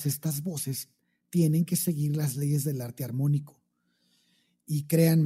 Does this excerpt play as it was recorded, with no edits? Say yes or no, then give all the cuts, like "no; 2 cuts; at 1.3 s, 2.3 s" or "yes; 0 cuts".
yes; 0 cuts